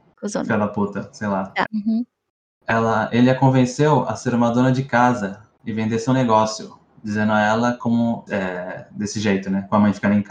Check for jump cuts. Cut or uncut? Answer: cut